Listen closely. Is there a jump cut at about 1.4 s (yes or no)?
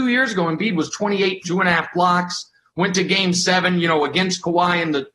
yes